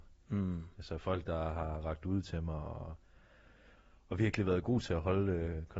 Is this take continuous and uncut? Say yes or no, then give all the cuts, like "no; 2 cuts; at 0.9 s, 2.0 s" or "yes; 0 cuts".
yes; 0 cuts